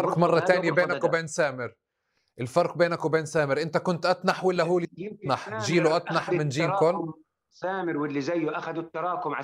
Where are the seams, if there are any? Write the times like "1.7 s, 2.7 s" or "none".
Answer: none